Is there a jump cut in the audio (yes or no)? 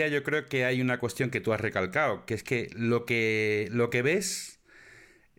no